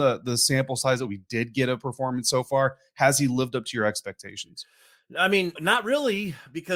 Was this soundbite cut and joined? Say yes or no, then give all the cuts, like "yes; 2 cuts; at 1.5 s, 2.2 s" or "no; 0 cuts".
yes; 1 cut; at 5.6 s